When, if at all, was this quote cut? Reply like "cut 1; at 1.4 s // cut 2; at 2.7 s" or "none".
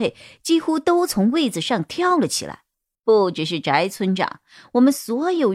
cut 1; at 2.9 s

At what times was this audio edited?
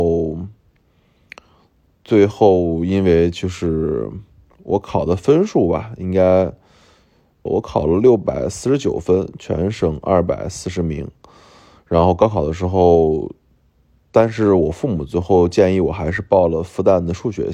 cut 1; at 7.5 s

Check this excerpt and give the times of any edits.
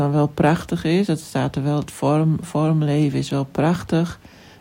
none

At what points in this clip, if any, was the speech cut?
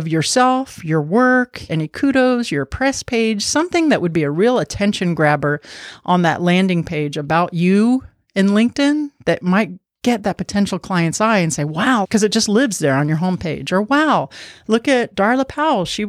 cut 1; at 1.7 s // cut 2; at 12.0 s

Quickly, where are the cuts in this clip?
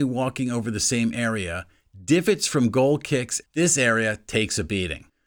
cut 1; at 3.4 s

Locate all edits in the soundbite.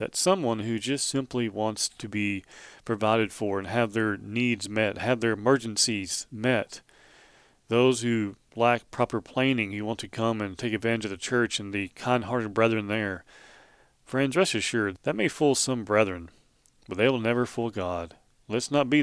cut 1; at 14.9 s

